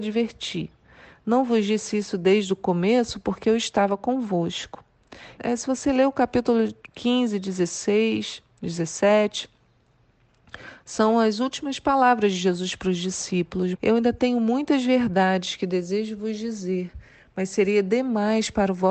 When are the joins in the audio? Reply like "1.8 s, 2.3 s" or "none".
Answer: 5.4 s, 13.7 s